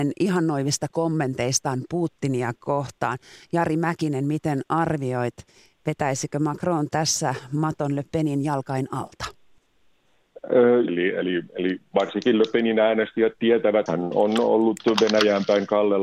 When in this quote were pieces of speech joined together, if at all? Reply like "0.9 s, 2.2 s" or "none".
10.9 s, 13.9 s